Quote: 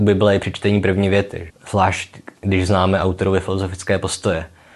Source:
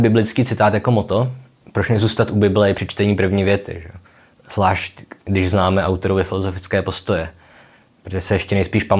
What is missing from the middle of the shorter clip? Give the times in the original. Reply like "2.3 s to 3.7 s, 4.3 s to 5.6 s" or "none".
3.8 s to 4.3 s